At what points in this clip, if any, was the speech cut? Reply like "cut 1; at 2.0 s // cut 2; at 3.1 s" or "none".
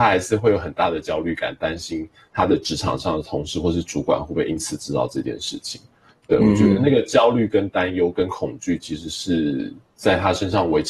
none

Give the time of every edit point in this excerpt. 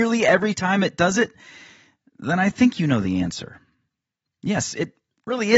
cut 1; at 4.2 s

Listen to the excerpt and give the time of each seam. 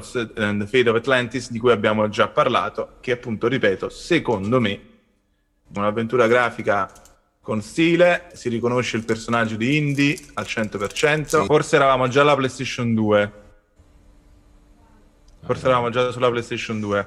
cut 1; at 5.8 s // cut 2; at 8.3 s // cut 3; at 11.5 s

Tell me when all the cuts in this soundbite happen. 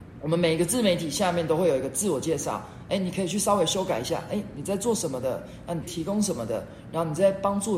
cut 1; at 5.8 s

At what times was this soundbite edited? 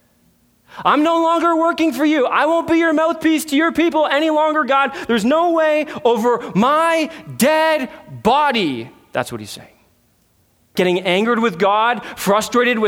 cut 1; at 10.8 s

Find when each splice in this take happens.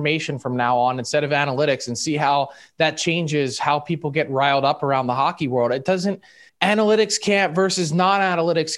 cut 1; at 6.5 s

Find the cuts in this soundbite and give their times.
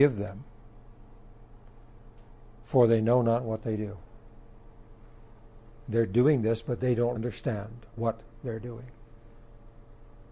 cut 1; at 7.1 s

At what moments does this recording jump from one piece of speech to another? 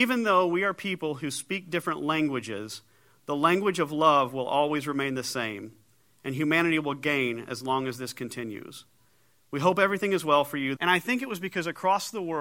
cut 1; at 10.8 s

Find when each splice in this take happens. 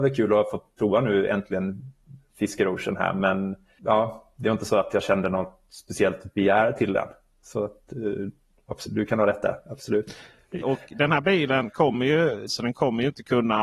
cut 1; at 10.6 s // cut 2; at 12.5 s

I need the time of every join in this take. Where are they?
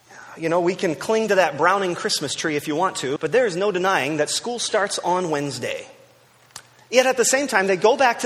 cut 1; at 3.2 s // cut 2; at 6.8 s

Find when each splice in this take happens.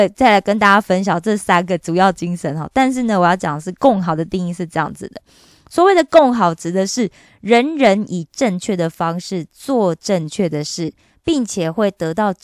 none

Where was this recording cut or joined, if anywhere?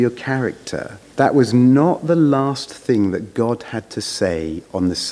cut 1; at 1.1 s

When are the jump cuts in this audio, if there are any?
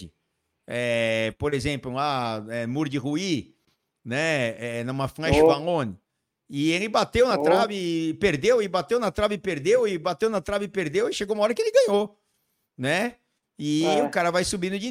none

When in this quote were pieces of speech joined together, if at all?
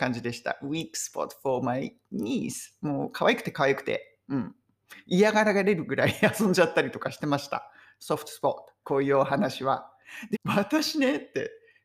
cut 1; at 8.8 s // cut 2; at 10.3 s

